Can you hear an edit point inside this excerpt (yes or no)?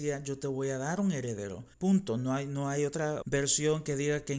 yes